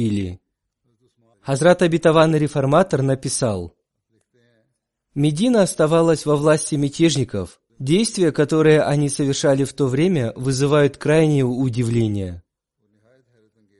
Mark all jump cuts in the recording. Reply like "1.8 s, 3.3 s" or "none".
1.3 s, 7.7 s